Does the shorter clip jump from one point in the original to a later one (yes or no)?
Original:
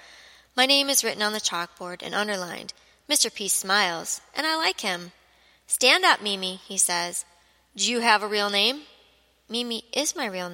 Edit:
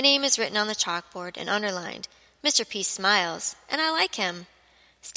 no